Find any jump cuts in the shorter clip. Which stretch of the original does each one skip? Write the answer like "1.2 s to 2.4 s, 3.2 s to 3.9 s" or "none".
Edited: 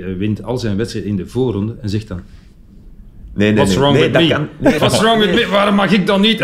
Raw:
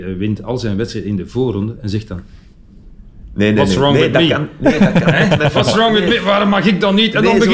4.8 s to 5.5 s